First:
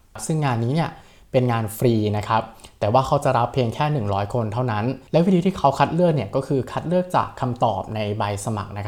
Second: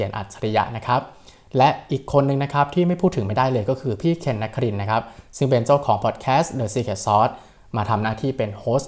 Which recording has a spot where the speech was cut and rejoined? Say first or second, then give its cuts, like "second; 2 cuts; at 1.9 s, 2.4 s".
first; 1 cut; at 5.1 s